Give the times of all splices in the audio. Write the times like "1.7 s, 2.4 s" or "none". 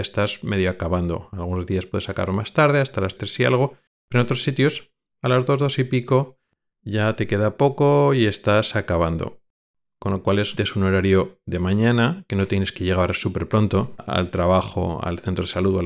3.2 s, 10.6 s, 14.0 s

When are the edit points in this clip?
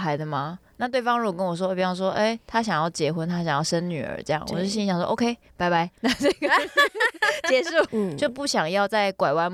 7.9 s

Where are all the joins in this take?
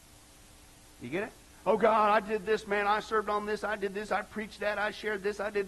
none

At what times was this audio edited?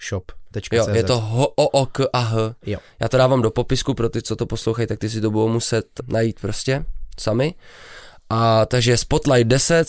6.0 s

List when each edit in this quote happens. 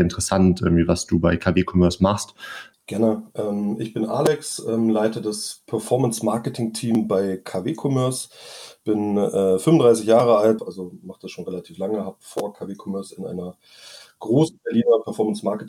2.7 s, 10.6 s

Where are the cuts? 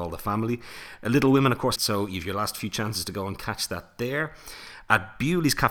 1.8 s

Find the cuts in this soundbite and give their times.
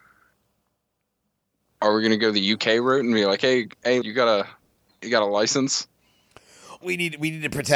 4.0 s, 6.8 s

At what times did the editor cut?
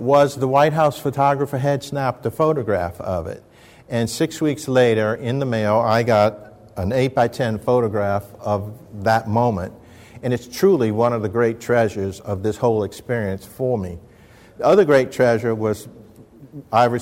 none

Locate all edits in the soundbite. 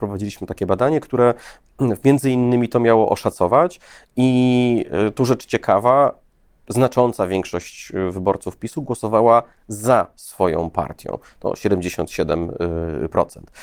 none

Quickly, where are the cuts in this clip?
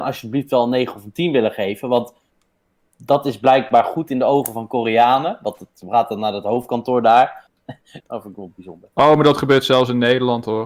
8.0 s

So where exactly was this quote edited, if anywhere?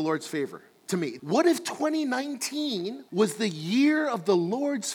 1.2 s, 3.1 s

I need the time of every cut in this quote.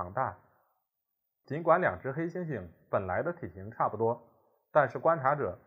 1.4 s

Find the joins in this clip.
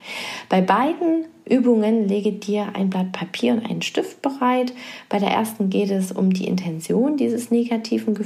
none

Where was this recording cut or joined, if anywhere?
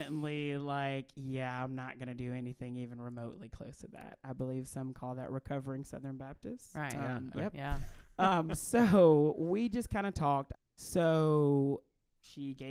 7.3 s, 10.5 s

